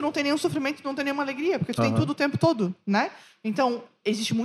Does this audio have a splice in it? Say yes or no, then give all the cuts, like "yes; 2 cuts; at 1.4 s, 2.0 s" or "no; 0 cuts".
no; 0 cuts